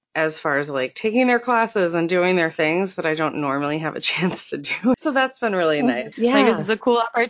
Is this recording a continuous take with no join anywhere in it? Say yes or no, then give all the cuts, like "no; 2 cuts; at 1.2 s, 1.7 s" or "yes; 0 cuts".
no; 2 cuts; at 4.9 s, 6.1 s